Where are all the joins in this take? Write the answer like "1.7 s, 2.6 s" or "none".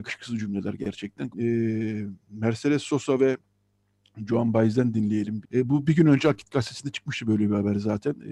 1.3 s, 5.4 s